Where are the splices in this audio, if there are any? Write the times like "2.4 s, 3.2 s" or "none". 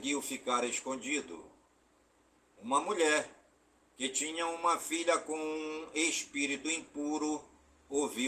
none